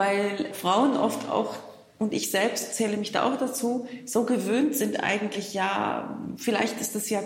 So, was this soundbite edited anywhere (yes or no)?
no